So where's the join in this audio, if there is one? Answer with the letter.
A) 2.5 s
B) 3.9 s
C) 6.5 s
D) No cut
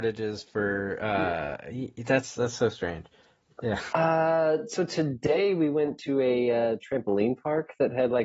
B